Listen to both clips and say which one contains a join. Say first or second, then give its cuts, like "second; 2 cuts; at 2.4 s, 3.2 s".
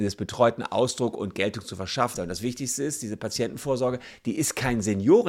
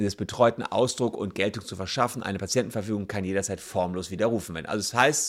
first; 1 cut; at 2.1 s